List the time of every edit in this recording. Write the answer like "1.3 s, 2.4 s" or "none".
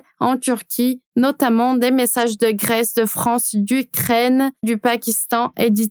4.6 s